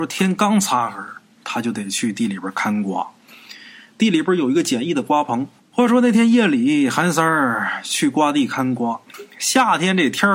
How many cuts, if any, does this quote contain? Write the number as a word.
one